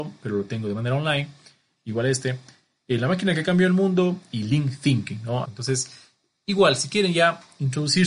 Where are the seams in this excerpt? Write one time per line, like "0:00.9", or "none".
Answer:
0:05.4